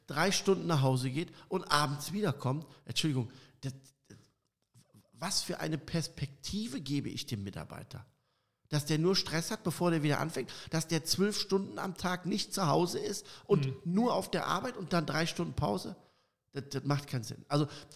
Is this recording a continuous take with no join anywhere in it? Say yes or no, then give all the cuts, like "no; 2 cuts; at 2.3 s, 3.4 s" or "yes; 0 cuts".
yes; 0 cuts